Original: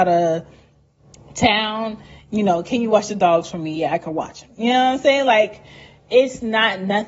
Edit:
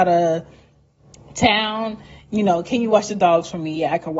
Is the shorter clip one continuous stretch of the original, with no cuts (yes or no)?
yes